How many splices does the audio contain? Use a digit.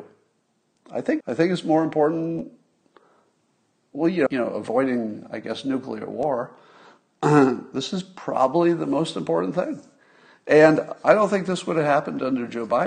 2